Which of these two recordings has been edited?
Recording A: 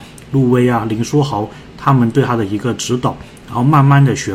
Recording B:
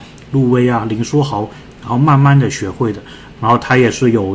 B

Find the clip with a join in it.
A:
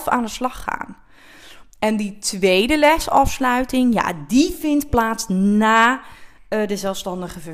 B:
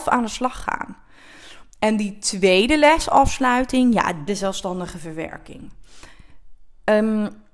B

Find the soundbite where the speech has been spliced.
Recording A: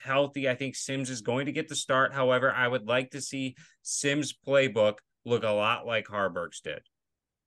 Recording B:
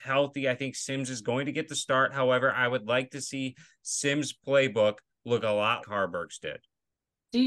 B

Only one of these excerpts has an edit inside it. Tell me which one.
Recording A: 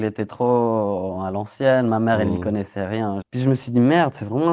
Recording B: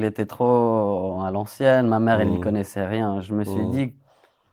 A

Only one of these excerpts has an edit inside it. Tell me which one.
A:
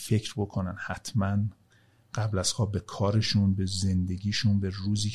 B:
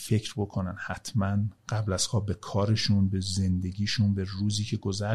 B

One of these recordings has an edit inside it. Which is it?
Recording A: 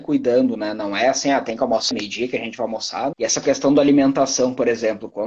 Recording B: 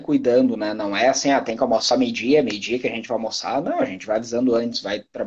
A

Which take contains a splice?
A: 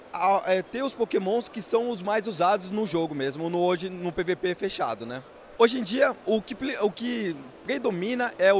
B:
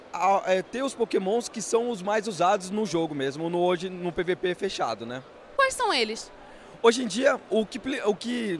A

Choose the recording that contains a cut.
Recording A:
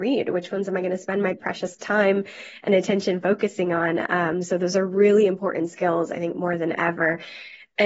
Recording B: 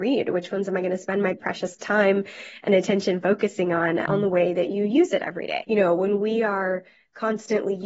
B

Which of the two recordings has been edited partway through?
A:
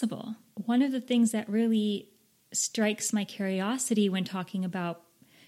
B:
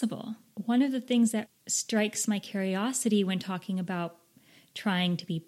B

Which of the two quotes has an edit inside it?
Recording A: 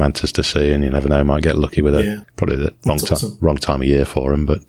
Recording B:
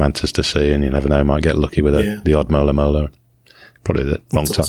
A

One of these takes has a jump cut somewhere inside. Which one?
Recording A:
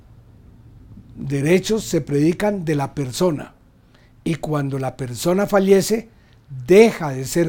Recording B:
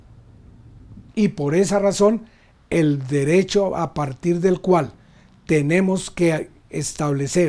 B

